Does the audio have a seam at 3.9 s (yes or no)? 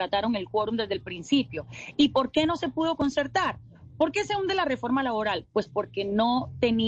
yes